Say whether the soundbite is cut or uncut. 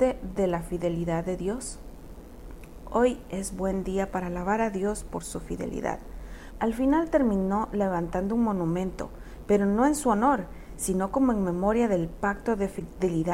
cut